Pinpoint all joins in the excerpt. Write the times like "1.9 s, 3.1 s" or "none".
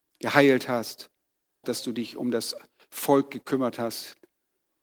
1.6 s

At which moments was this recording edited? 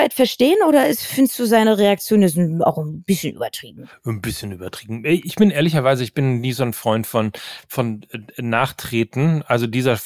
none

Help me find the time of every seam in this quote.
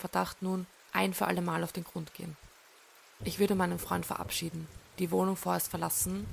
3.2 s, 4.9 s

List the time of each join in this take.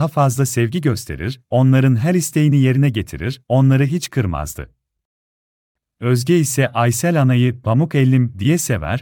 none

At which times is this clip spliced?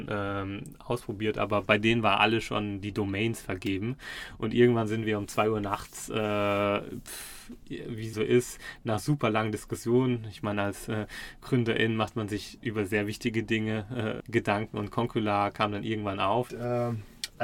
8.1 s, 14.2 s, 16.5 s

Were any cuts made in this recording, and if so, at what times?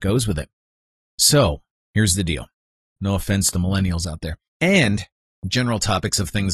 3.0 s, 4.5 s

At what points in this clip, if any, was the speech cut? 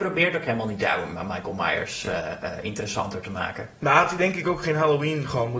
none

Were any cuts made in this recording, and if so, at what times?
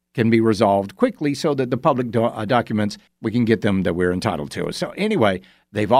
3.1 s

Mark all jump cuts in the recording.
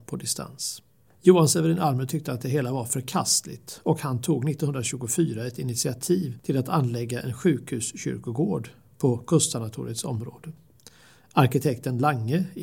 1.1 s

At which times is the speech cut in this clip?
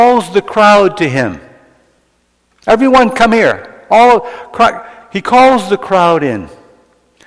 none

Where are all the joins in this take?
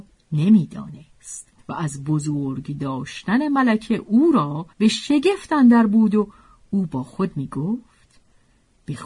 1.6 s, 4.7 s

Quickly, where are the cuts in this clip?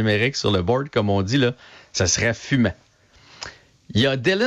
none

